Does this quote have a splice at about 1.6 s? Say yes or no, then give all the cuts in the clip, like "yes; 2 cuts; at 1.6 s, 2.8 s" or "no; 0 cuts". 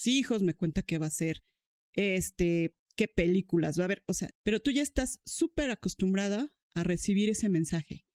no; 1 cut; at 4.3 s